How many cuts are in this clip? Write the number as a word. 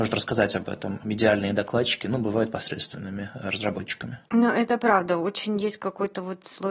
one